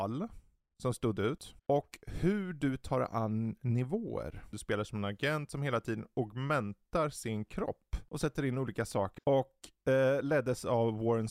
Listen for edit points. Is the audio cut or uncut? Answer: cut